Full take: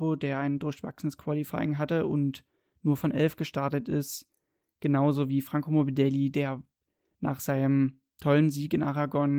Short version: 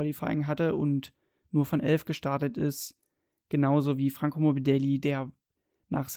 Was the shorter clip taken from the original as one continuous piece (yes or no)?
yes